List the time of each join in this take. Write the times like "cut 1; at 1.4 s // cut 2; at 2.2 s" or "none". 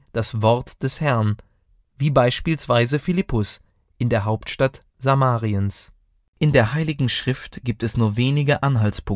cut 1; at 6.3 s